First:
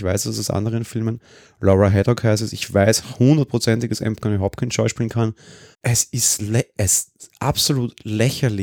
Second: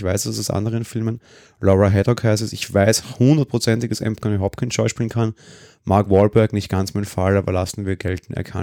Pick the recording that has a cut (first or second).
first